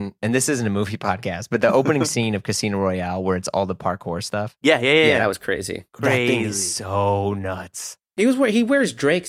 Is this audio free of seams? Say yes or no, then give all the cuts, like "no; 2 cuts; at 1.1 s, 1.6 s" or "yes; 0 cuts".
yes; 0 cuts